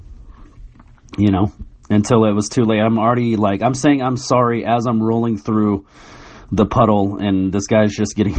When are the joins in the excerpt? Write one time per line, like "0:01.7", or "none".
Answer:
none